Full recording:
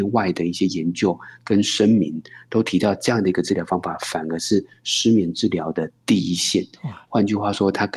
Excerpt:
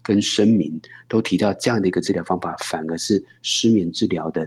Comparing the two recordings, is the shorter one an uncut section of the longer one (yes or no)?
yes